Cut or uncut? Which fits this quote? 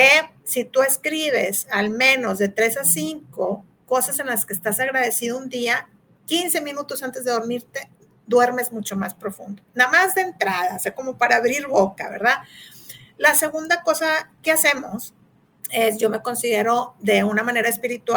uncut